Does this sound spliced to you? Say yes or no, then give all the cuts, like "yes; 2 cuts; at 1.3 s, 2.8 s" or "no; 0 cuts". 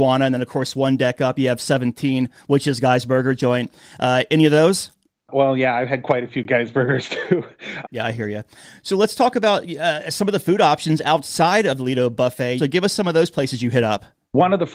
yes; 2 cuts; at 7.8 s, 12.6 s